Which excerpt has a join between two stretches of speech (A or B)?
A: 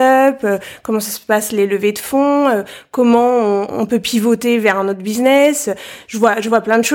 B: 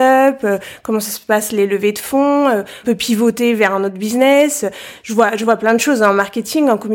B